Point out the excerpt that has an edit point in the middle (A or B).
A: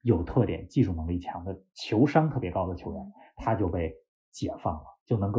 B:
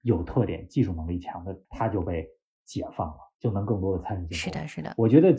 B